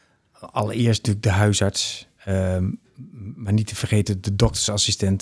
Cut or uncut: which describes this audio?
uncut